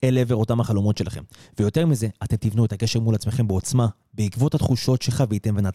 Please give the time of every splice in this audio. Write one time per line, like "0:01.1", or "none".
none